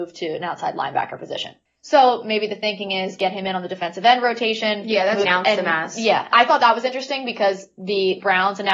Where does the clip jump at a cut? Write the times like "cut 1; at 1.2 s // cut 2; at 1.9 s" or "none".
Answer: cut 1; at 5.2 s // cut 2; at 6.3 s